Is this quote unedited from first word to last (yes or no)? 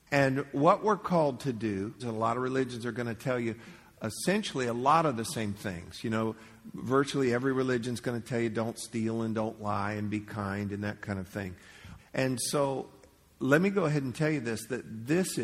no